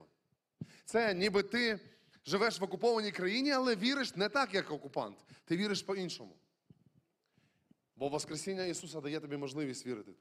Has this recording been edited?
no; 0 cuts

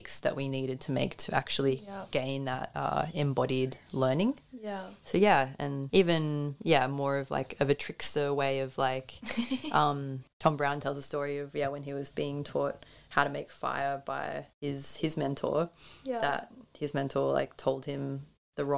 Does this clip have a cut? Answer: yes; 1 cut; at 14.5 s

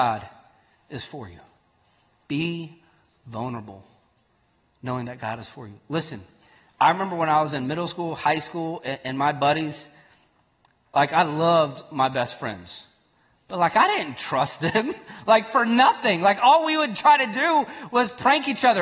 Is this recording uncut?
yes; 0 cuts

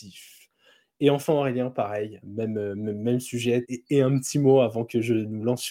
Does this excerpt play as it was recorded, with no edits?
no; 2 cuts; at 2.2 s, 3.6 s

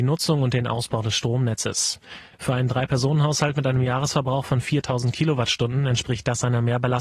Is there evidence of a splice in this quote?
yes; 1 cut; at 2.3 s

